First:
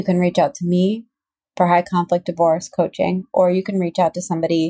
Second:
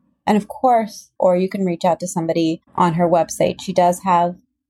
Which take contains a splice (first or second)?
second